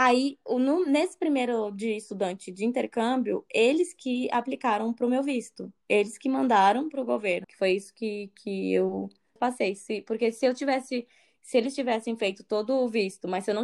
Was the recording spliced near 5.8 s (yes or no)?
no